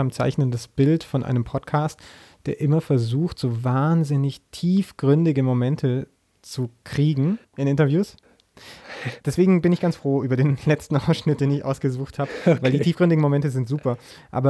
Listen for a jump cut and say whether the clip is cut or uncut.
cut